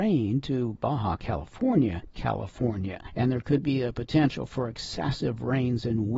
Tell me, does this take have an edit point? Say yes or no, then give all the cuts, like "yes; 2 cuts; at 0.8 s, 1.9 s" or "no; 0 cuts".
yes; 1 cut; at 2.1 s